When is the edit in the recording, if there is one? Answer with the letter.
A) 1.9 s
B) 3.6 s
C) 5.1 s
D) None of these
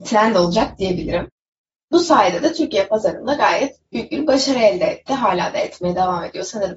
A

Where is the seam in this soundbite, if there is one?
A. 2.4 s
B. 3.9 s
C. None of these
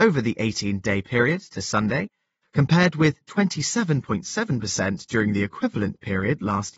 A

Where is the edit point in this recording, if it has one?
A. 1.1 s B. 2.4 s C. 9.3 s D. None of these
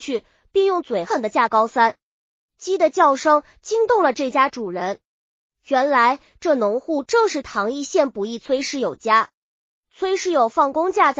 A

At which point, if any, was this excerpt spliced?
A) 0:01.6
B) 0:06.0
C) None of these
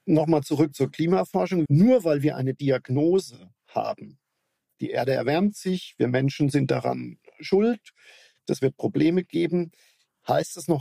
A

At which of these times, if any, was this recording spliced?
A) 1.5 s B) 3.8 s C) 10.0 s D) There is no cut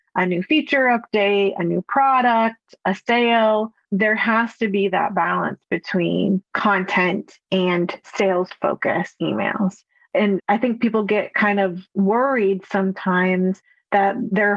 B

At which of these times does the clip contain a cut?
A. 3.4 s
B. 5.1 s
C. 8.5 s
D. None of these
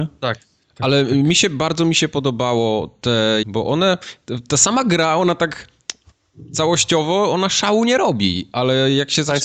A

